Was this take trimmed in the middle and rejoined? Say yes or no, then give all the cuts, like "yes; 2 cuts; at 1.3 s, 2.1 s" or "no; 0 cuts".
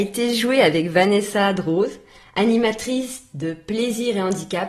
no; 0 cuts